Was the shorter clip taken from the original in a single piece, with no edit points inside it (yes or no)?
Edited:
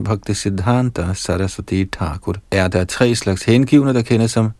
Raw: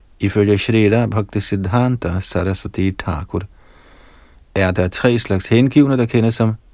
no